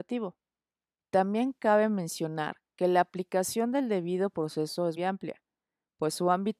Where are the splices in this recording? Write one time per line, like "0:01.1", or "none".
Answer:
0:01.0
0:05.0